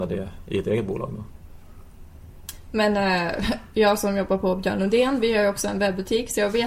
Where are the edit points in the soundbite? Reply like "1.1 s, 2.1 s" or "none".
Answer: none